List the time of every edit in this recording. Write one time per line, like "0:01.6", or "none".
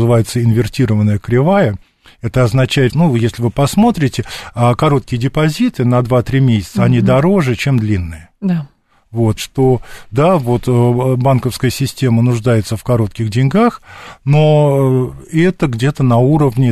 0:02.9
0:09.4

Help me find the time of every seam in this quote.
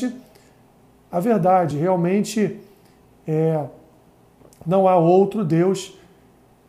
none

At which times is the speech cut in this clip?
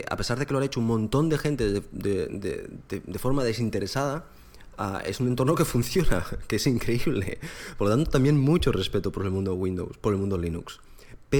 none

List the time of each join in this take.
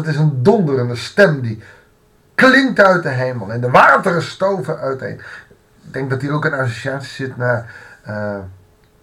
none

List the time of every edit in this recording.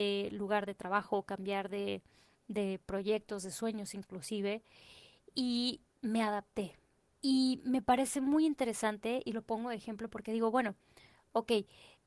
0:07.1

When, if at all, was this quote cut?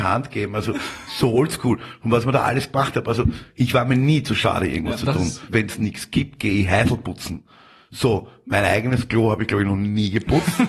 0:05.5

